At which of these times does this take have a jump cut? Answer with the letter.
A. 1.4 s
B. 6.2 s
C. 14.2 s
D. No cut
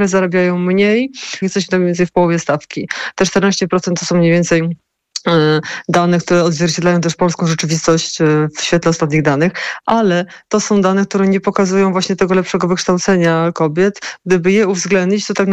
A